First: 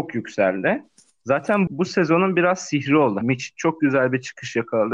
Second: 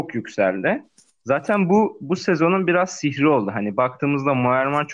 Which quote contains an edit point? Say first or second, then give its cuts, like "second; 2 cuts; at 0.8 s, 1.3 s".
first; 2 cuts; at 1.7 s, 3.2 s